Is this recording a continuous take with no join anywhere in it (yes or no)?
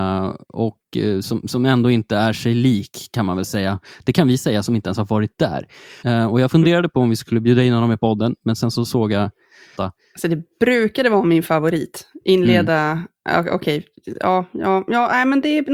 no